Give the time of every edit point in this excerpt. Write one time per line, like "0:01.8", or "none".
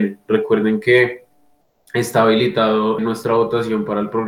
0:03.0